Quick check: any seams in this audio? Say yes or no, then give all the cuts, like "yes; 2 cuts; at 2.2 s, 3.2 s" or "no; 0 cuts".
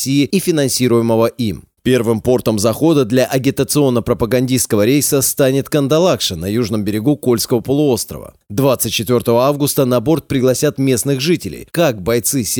yes; 2 cuts; at 1.8 s, 11.7 s